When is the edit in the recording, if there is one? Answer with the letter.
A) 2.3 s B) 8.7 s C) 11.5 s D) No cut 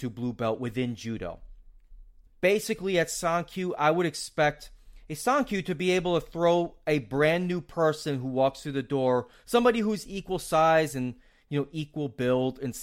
A